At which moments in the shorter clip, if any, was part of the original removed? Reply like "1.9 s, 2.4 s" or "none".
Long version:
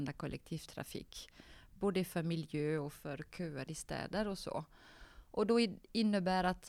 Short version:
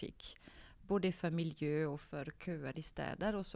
none